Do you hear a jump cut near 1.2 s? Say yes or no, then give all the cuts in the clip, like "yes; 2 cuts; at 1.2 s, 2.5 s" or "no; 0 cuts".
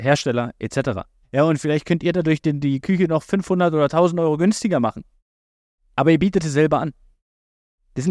yes; 1 cut; at 1.2 s